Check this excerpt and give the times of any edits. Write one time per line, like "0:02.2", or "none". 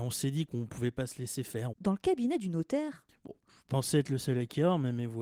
0:01.7

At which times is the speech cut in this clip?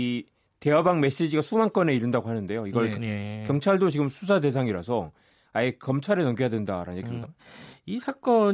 0:02.9
0:07.2

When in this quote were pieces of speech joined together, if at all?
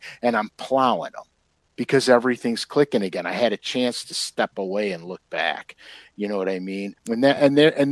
0:07.0

